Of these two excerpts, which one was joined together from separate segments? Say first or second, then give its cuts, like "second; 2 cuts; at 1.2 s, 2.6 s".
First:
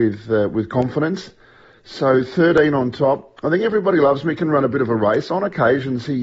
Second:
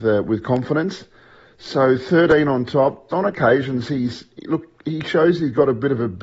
second; 1 cut; at 3.1 s